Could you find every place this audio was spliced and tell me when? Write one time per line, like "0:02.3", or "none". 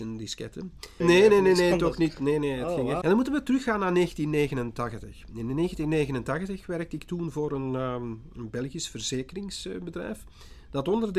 0:01.0
0:03.0